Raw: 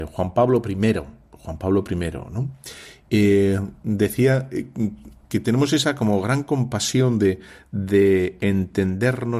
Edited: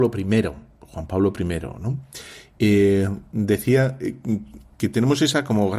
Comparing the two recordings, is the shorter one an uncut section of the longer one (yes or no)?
yes